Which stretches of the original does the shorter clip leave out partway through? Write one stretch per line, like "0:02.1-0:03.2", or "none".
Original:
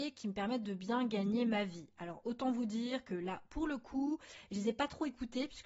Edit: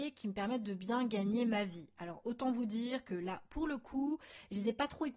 none